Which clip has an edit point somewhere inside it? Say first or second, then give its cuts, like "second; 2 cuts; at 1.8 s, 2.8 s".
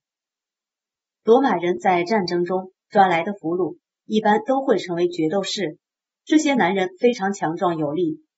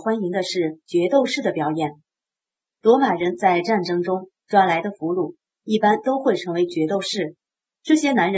first; 1 cut; at 1.1 s